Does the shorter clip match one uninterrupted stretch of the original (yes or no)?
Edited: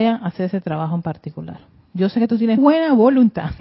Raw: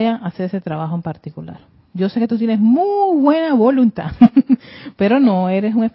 no